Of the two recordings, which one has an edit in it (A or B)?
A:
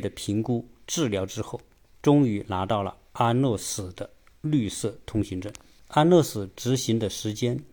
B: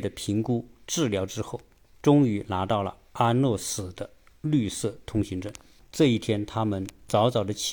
B